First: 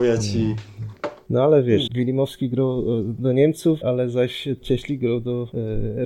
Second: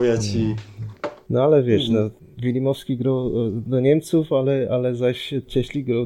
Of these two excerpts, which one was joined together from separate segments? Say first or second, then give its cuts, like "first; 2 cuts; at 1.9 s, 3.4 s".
first; 2 cuts; at 1.9 s, 3.8 s